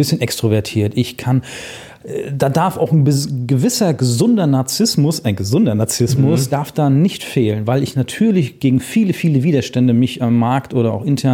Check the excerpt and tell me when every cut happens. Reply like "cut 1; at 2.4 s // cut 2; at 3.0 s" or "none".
none